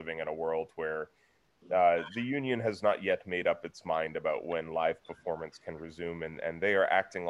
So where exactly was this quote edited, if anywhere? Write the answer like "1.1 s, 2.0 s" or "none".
none